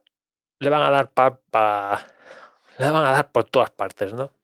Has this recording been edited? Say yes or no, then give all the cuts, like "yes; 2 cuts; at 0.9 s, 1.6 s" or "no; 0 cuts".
yes; 1 cut; at 1.5 s